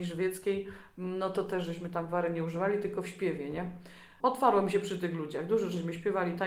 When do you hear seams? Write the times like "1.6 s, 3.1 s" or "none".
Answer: 4.2 s